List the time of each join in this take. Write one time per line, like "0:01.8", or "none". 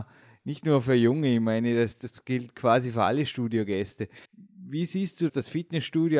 0:04.2
0:05.3